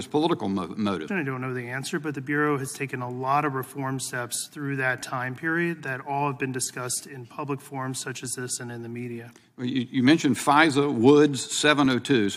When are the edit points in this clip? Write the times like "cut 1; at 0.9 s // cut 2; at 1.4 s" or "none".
cut 1; at 1.1 s